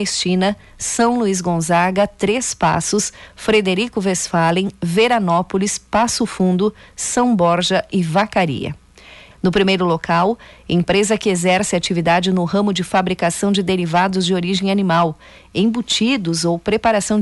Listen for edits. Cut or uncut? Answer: cut